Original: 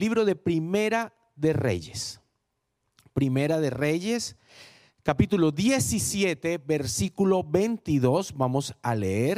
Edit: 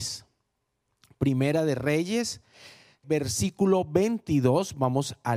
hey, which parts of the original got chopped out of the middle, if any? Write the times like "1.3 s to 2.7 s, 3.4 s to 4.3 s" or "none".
5.0 s to 6.6 s